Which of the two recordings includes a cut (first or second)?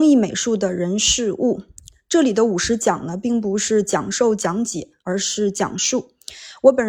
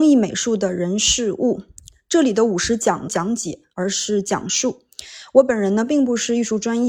second